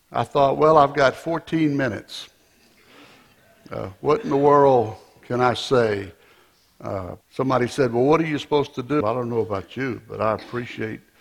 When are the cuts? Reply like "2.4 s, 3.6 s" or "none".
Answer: 7.2 s, 9.0 s